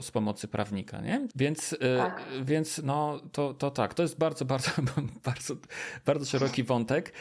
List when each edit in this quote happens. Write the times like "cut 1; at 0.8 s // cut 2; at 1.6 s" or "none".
cut 1; at 1.3 s